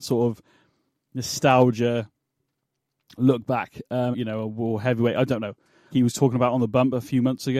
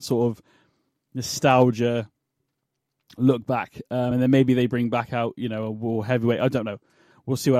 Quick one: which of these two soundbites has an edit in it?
first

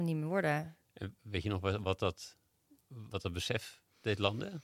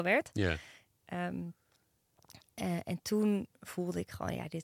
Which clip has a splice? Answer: first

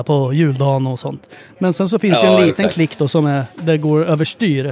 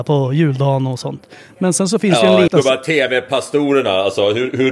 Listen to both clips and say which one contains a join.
second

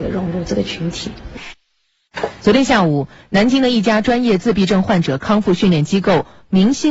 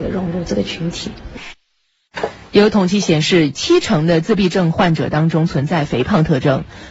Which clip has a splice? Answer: first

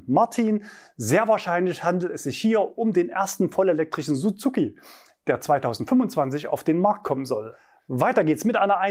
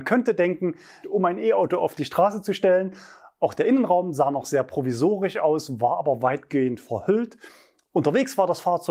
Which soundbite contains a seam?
second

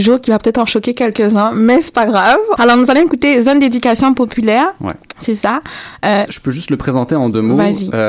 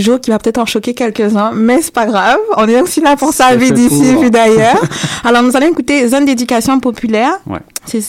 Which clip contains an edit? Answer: first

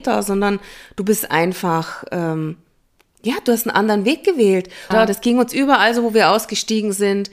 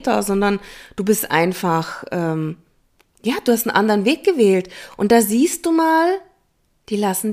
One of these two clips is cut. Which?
first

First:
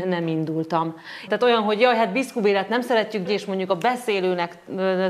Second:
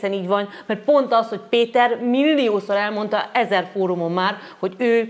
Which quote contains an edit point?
first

